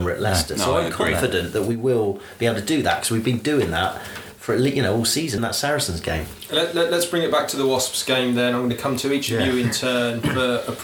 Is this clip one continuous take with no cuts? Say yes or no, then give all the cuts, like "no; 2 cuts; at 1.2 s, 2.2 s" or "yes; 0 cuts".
no; 1 cut; at 5.4 s